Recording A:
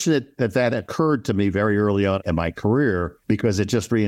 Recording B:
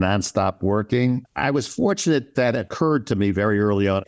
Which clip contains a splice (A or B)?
B